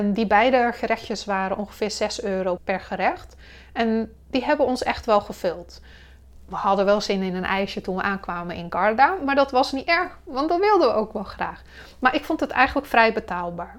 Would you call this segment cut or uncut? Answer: cut